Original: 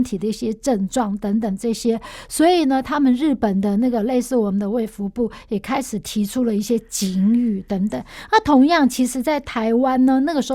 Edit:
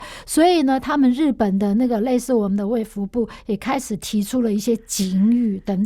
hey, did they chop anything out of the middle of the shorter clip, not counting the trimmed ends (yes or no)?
no